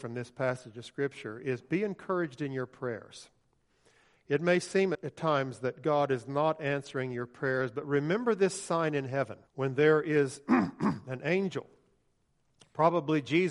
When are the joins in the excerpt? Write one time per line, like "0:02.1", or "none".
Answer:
0:04.9
0:09.5